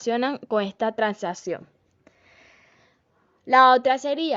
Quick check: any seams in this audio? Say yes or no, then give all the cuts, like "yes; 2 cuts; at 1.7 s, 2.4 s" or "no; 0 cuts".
no; 0 cuts